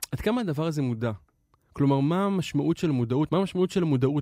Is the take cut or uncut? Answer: cut